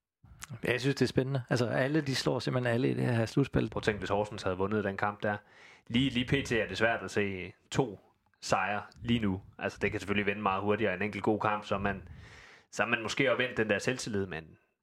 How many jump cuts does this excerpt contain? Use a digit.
1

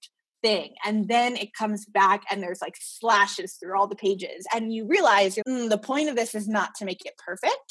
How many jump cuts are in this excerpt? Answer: 1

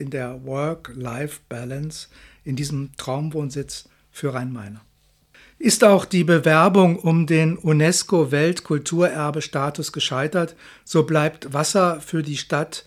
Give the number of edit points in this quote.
0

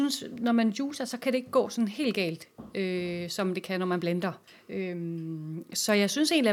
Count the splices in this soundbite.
0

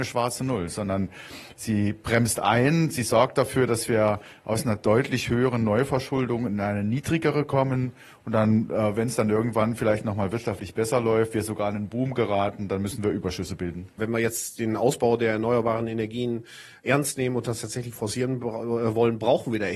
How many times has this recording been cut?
1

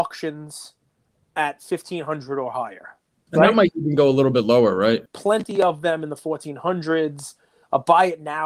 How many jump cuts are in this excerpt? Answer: 2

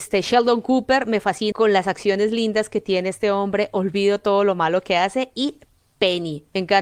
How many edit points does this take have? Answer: 1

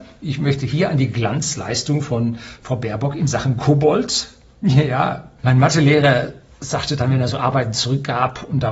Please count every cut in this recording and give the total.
1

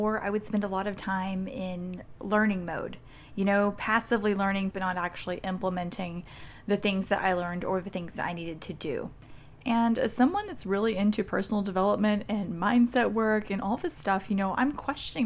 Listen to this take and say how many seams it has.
1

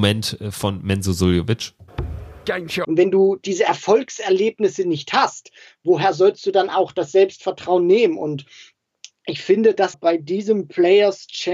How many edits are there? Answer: 2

